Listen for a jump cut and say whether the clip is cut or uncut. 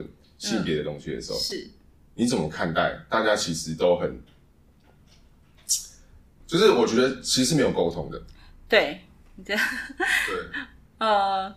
cut